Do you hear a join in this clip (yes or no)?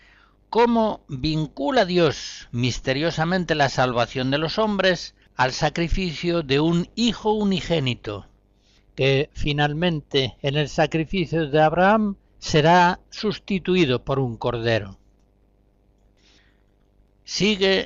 no